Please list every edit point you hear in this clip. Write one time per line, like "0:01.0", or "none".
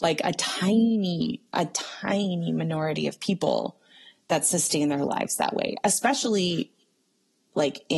none